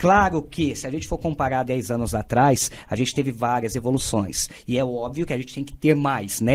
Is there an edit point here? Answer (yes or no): no